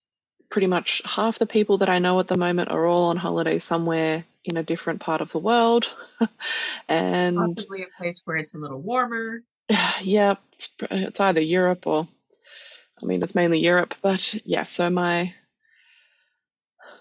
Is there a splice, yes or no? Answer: no